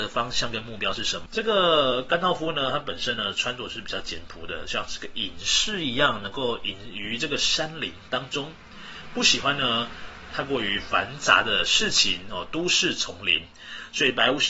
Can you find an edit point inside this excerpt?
yes; 1 cut; at 1.3 s

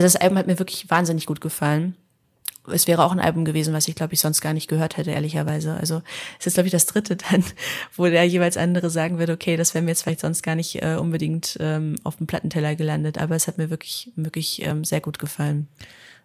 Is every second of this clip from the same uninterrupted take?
yes; 0 cuts

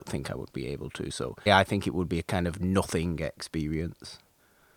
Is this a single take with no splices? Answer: no; 1 cut; at 1.5 s

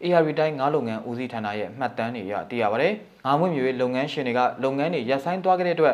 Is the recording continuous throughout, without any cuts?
no; 1 cut; at 3.2 s

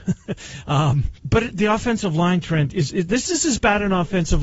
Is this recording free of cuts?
no; 2 cuts; at 1.2 s, 2.9 s

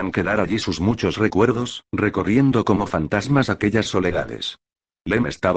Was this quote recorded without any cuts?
no; 1 cut; at 1.8 s

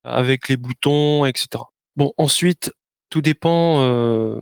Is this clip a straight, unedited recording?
no; 1 cut; at 1.8 s

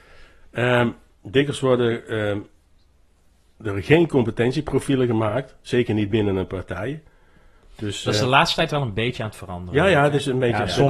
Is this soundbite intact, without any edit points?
yes; 0 cuts

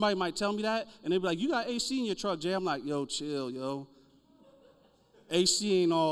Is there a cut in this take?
no; 0 cuts

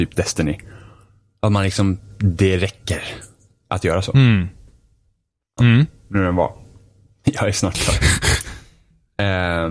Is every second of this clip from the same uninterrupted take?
no; 2 cuts; at 5.6 s, 7.2 s

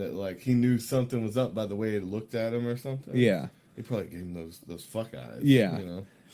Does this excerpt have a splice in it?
no; 0 cuts

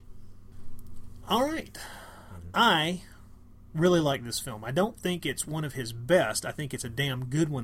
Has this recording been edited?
no; 0 cuts

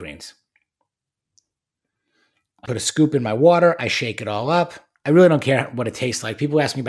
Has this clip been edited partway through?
yes; 1 cut; at 2.7 s

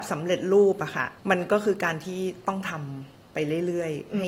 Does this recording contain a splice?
yes; 1 cut; at 1.2 s

